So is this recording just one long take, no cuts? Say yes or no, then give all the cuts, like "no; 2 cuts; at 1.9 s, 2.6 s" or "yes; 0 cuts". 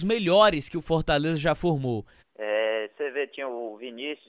no; 1 cut; at 2.2 s